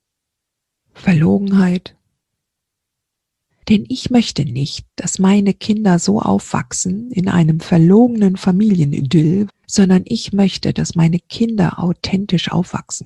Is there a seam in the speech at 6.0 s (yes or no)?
no